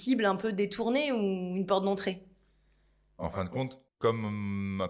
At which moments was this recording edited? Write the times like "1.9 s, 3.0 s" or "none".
3.9 s